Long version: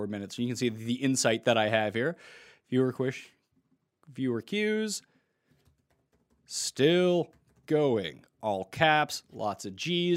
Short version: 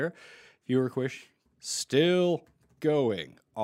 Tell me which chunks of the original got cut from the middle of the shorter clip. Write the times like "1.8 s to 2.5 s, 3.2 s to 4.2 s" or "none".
3.5 s to 6.3 s